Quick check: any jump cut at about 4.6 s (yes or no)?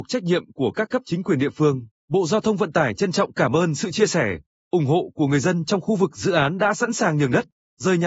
no